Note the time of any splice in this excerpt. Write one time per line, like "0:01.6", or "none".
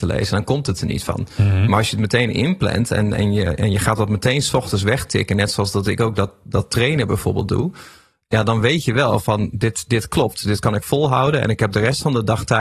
none